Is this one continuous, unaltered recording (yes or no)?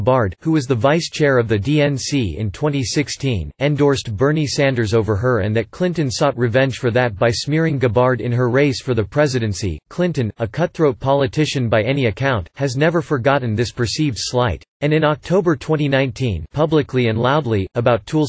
no